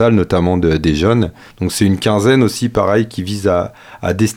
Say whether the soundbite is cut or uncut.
cut